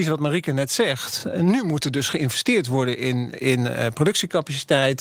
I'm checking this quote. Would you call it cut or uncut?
uncut